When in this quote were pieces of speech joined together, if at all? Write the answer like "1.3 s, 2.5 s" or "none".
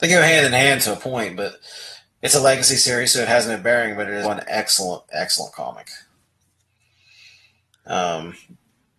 4.2 s